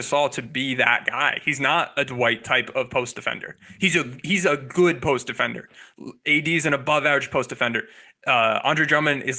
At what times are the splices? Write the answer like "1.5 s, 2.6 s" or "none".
none